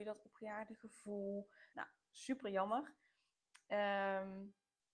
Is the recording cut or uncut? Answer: cut